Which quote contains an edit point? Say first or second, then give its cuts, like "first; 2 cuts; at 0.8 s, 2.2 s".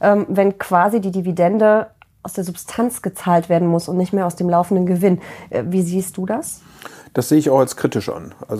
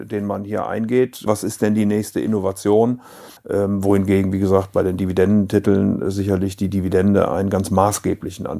second; 2 cuts; at 1.3 s, 3.4 s